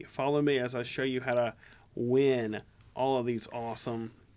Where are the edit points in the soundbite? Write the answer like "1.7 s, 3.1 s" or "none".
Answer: none